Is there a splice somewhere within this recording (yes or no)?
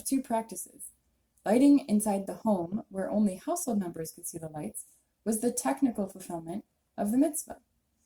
no